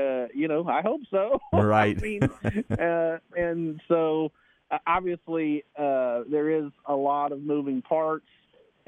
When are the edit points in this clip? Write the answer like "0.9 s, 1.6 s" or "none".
none